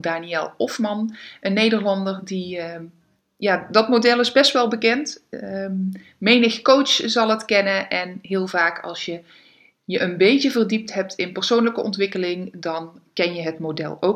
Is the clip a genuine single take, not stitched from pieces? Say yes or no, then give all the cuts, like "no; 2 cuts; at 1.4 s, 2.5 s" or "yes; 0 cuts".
yes; 0 cuts